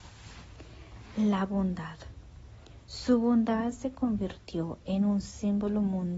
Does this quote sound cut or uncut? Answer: uncut